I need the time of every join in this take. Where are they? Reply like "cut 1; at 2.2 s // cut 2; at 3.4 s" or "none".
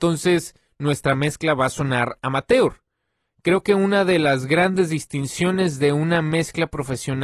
none